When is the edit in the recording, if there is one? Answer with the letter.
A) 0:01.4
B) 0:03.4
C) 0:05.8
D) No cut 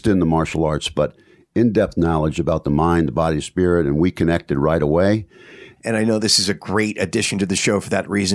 C